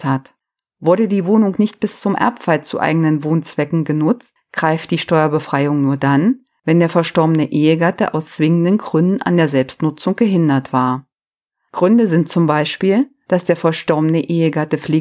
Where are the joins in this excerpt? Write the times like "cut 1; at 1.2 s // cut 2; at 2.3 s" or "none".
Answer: none